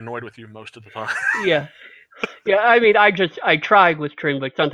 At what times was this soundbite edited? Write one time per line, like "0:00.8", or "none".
none